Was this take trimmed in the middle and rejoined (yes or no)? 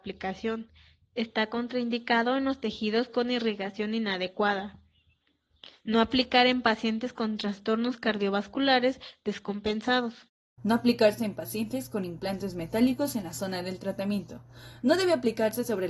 yes